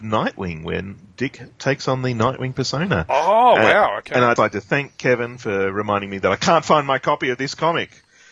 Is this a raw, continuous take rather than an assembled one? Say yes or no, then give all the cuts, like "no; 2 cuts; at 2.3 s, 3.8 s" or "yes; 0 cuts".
no; 1 cut; at 4.4 s